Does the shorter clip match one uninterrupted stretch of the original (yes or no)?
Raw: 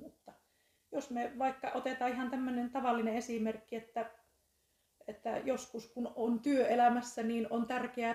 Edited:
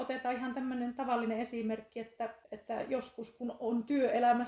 no